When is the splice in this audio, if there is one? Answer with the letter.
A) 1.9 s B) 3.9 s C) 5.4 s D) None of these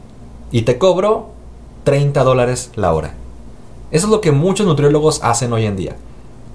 D